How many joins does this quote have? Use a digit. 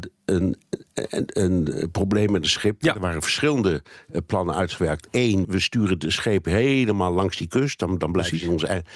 2